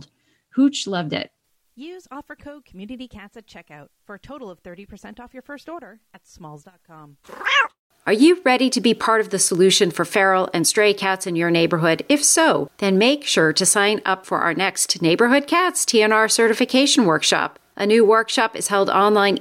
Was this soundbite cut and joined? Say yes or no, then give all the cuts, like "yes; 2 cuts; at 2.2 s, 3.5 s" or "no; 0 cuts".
no; 0 cuts